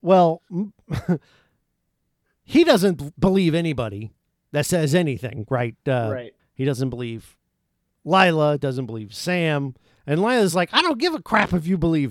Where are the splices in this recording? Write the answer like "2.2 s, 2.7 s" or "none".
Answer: 6.4 s